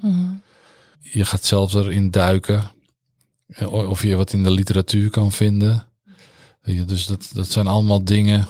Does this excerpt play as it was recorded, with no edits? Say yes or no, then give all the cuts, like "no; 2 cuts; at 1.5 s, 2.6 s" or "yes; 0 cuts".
no; 1 cut; at 0.9 s